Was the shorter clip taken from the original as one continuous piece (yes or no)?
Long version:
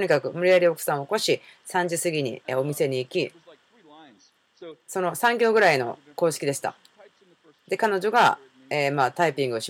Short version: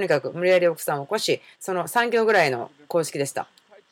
no